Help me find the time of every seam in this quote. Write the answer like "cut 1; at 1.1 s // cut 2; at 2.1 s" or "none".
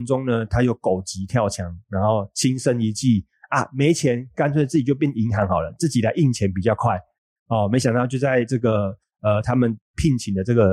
none

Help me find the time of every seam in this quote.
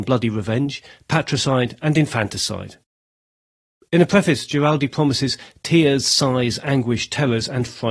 none

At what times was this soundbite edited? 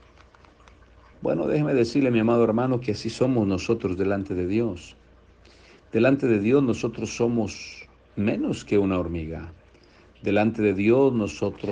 cut 1; at 1.1 s

